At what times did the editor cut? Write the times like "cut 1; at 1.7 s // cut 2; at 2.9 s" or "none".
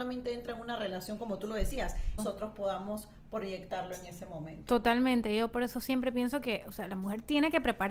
cut 1; at 2.2 s